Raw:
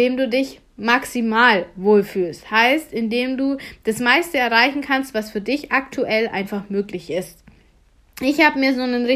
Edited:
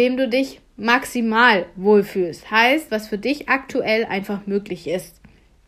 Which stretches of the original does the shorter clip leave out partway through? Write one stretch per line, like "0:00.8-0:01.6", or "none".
0:02.9-0:05.1